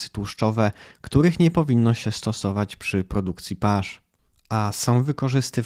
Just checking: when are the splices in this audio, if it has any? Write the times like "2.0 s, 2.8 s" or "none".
none